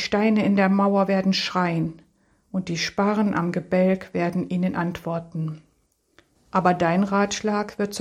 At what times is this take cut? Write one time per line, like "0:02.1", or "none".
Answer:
0:06.3